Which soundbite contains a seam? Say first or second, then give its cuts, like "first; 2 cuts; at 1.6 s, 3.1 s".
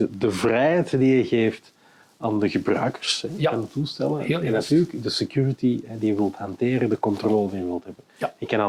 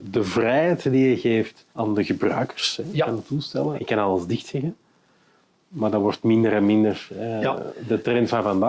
second; 2 cuts; at 1.7 s, 3.8 s